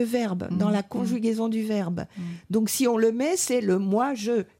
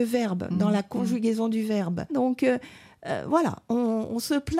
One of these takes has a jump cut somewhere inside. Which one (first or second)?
second